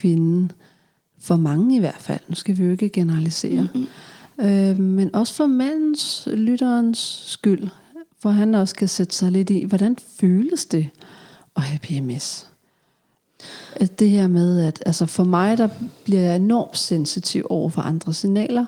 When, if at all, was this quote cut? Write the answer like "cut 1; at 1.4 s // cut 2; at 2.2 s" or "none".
none